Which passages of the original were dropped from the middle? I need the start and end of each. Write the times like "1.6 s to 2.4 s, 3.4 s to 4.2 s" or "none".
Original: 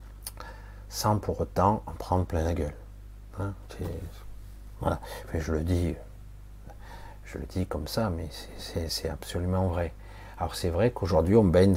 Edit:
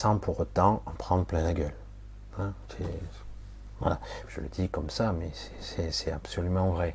5.3 s to 7.2 s